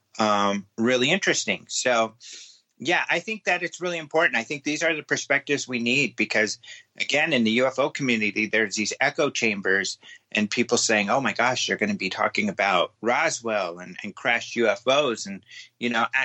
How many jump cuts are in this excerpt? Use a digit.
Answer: 1